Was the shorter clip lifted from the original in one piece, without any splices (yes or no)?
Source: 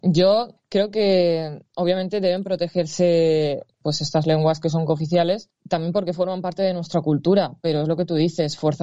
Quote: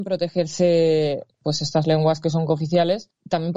yes